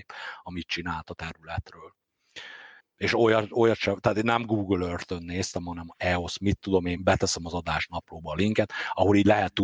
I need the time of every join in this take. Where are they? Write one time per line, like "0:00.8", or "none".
0:02.8
0:07.0